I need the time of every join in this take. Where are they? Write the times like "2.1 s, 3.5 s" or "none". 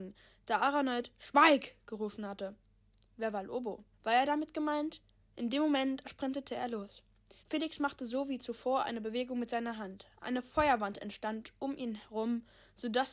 3.9 s, 6.0 s, 7.4 s